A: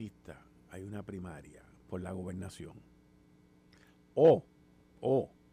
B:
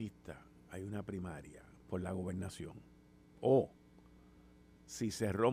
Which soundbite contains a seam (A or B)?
B